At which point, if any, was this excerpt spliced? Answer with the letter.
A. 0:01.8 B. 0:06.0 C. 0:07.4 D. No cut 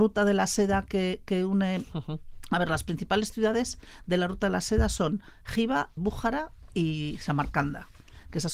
B